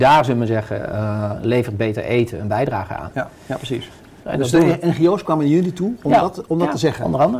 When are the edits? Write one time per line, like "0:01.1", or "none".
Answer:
0:04.2